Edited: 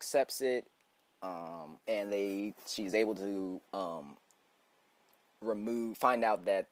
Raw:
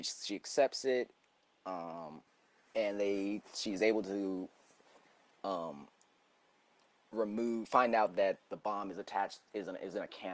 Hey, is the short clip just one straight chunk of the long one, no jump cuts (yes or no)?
no